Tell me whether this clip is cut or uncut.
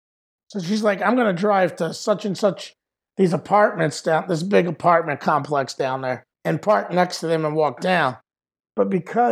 cut